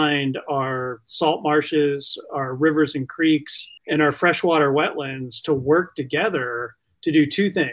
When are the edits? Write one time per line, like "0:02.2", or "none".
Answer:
0:03.8